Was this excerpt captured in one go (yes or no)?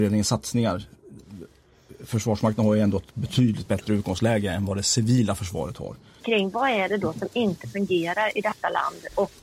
no